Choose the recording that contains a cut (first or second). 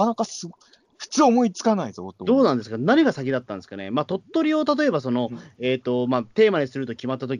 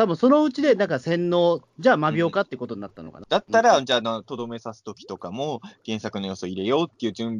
second